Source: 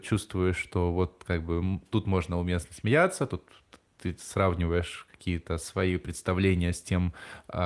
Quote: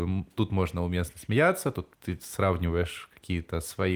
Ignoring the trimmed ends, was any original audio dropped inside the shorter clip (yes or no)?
yes